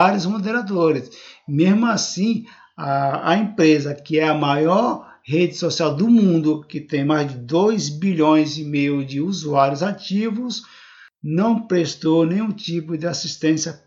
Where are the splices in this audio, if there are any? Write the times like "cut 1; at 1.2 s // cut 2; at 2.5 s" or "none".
none